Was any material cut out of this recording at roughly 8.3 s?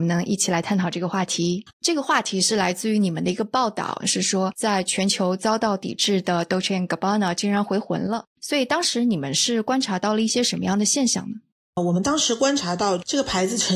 no; 2 cuts; at 1.7 s, 4.0 s

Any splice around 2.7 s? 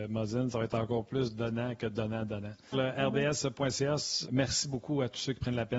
yes; 2 cuts; at 2.7 s, 4.2 s

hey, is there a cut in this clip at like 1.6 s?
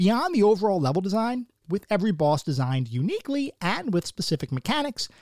yes; 1 cut; at 1.6 s

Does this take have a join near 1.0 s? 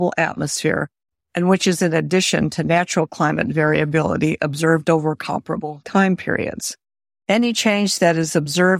no; 1 cut; at 7.2 s

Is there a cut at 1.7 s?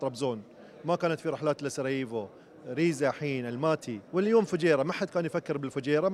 no; 1 cut; at 4.1 s

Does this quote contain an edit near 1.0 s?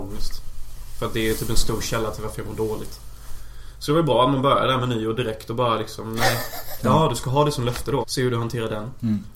no; 2 cuts; at 6.8 s, 8.0 s

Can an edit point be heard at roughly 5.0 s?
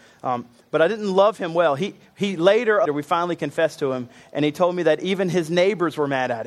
no; 1 cut; at 2.9 s

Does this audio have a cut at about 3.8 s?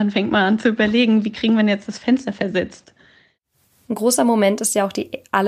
no; 0 cuts

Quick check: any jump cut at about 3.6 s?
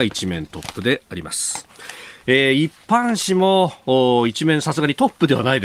no; 1 cut; at 2.2 s

